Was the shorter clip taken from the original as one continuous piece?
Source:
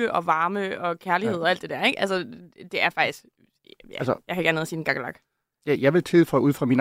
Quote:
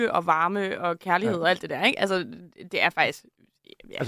yes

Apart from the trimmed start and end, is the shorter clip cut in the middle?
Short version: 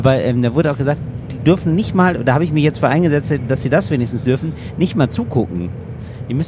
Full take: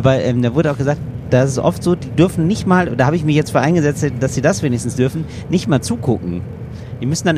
yes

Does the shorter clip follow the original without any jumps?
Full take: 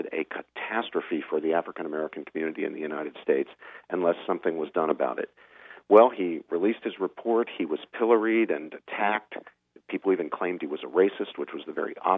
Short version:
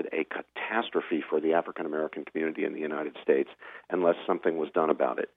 yes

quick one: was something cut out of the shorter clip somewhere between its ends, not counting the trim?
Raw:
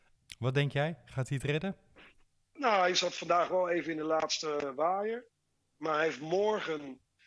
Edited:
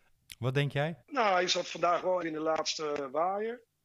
yes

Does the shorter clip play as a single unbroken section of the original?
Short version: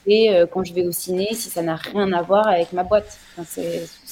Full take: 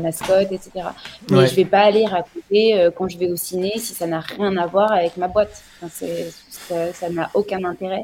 yes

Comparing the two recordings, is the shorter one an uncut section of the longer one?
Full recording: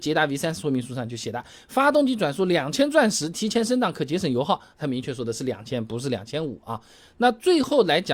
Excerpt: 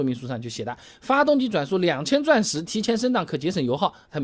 yes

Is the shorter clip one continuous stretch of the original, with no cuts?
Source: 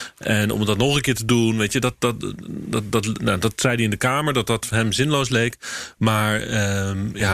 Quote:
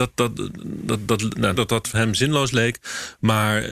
no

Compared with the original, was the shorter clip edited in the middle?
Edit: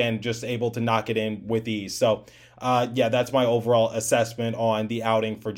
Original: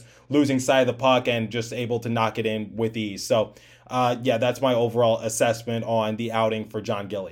no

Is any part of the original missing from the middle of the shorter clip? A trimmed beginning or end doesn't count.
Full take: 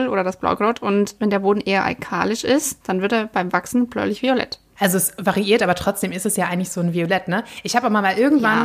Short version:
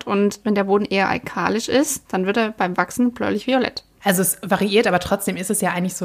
no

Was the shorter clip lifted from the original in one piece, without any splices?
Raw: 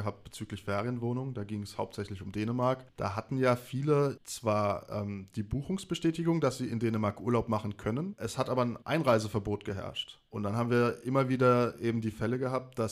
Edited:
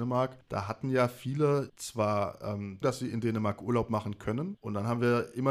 no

